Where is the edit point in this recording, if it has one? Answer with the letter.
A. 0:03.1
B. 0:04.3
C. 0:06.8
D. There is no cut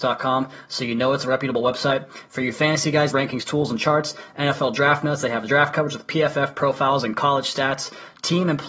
A